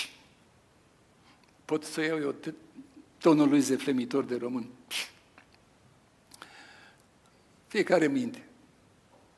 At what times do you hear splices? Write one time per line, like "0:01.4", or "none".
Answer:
none